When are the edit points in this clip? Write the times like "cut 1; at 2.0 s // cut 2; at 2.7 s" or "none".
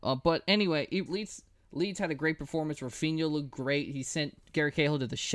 cut 1; at 1.1 s